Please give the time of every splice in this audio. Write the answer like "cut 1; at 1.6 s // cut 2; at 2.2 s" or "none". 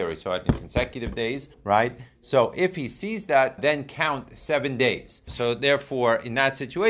cut 1; at 1.5 s // cut 2; at 3.6 s // cut 3; at 5.3 s